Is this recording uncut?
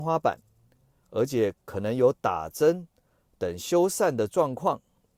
no; 1 cut; at 1.0 s

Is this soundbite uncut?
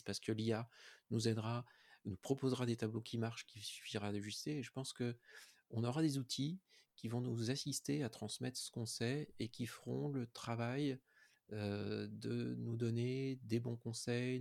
yes; 0 cuts

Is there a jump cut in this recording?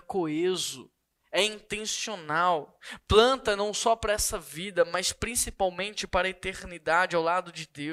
no; 0 cuts

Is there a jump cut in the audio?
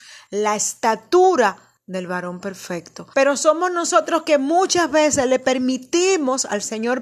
yes; 1 cut; at 3.1 s

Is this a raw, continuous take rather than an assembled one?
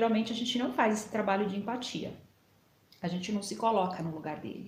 yes; 0 cuts

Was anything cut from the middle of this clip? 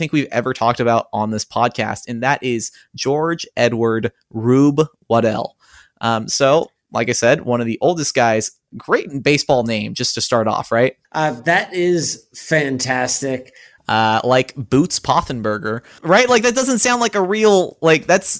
yes; 3 cuts; at 11.0 s, 13.8 s, 16.0 s

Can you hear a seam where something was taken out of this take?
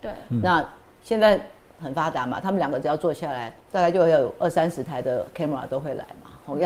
yes; 1 cut; at 3.6 s

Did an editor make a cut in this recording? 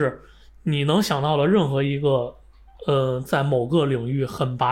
no; 0 cuts

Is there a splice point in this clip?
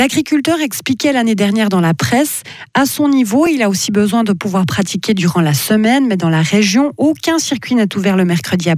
no; 0 cuts

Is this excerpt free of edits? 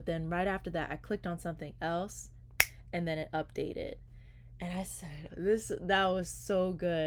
no; 1 cut; at 5.3 s

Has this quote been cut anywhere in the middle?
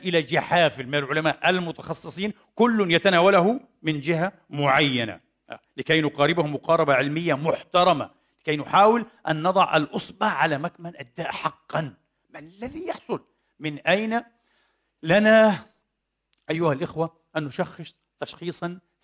no; 0 cuts

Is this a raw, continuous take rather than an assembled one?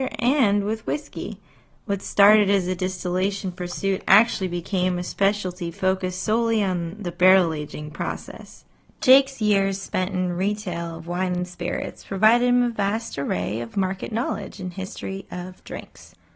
yes; 0 cuts

